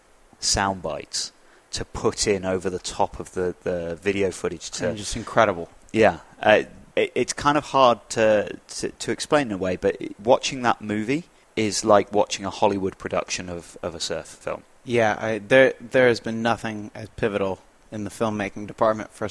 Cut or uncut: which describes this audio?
uncut